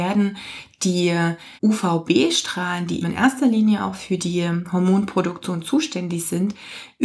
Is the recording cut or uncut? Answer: cut